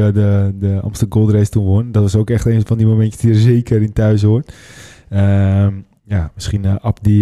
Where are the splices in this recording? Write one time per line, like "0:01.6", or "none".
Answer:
none